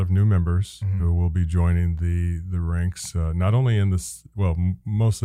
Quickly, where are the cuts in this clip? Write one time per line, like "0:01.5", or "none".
none